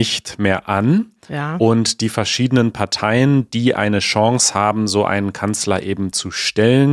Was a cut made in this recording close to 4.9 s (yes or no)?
no